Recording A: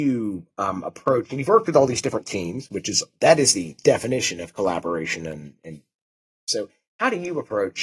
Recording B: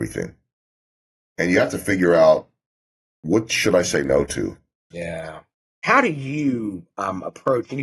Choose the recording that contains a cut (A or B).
B